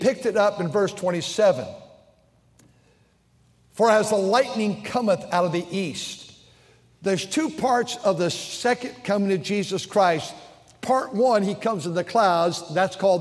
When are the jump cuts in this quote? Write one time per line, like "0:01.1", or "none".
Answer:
none